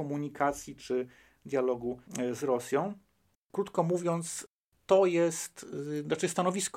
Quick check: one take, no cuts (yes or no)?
no